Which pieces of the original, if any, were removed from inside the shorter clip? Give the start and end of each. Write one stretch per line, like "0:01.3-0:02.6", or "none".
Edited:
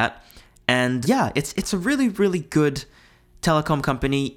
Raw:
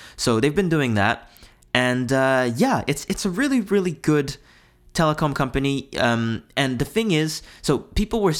0:02.1-0:02.5

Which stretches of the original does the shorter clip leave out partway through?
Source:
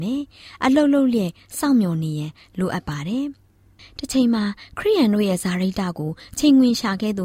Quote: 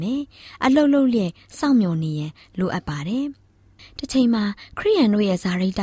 none

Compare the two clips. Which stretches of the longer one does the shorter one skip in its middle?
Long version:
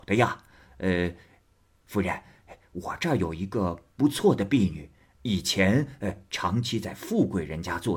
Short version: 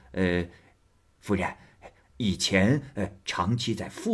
0:02.7-0:05.1

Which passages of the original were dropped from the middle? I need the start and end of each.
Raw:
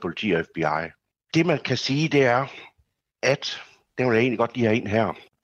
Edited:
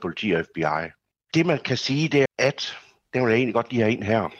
0:02.3-0:03.1

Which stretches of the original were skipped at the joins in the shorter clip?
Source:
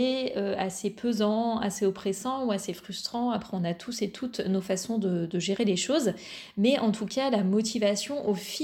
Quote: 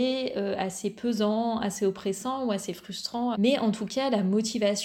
0:03.3-0:06.5

